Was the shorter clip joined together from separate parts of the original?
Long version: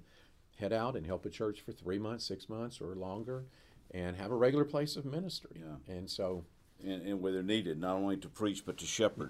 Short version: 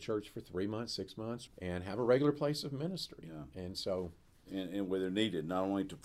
yes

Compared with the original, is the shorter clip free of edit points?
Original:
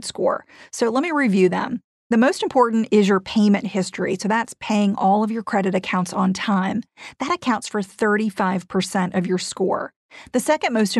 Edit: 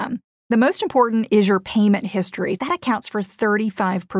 no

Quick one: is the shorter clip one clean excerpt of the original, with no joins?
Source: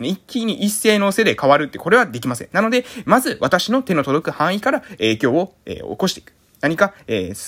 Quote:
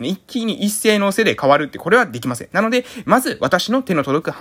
yes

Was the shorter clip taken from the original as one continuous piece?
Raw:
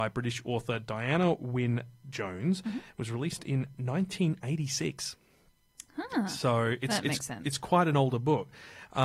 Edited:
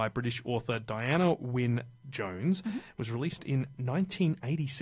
yes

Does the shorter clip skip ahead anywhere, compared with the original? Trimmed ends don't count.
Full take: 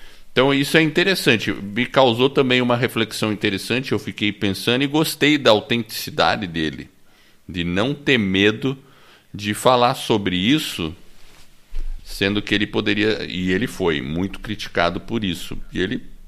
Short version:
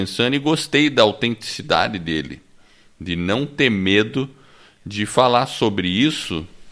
no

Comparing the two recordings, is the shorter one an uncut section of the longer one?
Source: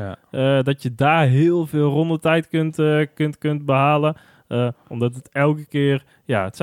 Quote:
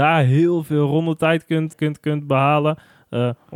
no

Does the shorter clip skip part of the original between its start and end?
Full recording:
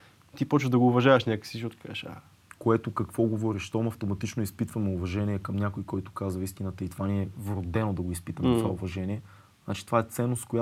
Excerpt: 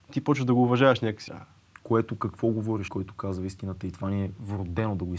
yes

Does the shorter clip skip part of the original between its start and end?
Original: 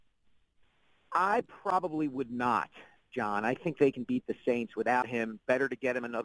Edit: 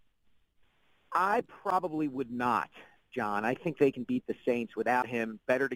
no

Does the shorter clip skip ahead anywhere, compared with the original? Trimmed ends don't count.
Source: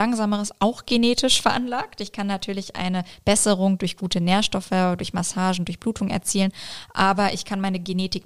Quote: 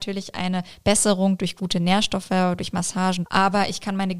yes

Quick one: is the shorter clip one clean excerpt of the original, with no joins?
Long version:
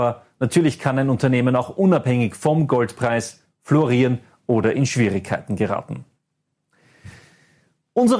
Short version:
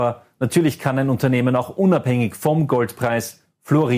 yes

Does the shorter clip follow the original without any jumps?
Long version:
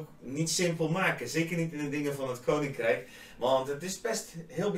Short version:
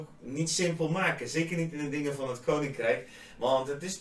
yes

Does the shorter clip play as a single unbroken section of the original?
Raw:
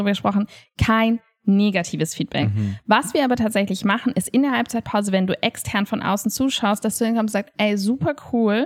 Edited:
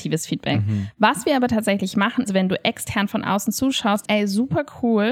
no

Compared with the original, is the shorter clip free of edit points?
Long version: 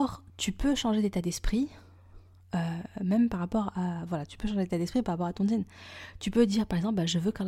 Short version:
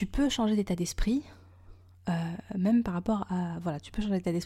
yes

